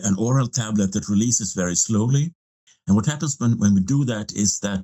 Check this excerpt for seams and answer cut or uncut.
uncut